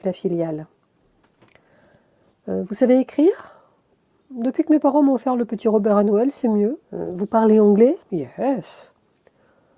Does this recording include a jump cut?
yes; 2 cuts; at 6.8 s, 8.0 s

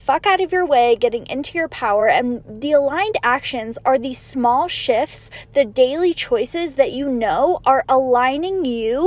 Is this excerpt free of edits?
yes; 0 cuts

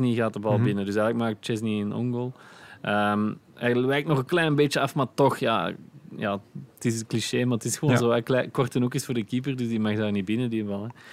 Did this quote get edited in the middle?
no; 0 cuts

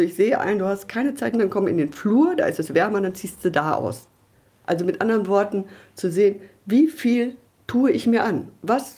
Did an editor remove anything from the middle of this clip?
yes; 1 cut; at 1.3 s

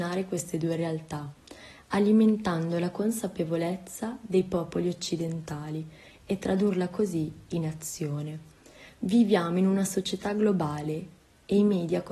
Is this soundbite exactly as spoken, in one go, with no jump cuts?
yes; 0 cuts

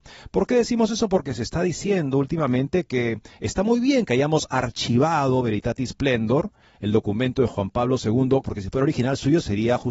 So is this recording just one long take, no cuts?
no; 1 cut; at 8.4 s

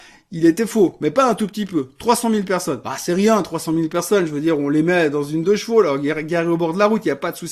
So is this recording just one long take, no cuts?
yes; 0 cuts

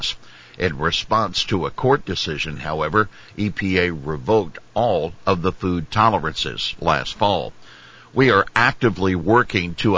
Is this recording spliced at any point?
no; 0 cuts

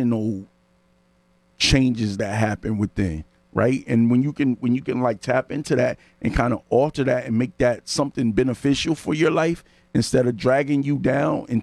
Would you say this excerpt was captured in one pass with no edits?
yes; 0 cuts

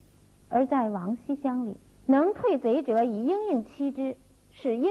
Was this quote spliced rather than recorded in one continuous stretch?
yes; 1 cut; at 1.9 s

